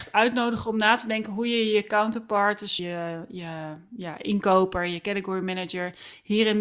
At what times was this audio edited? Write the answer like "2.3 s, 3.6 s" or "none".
2.8 s